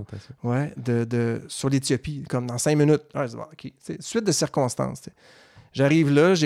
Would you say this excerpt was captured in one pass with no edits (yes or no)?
yes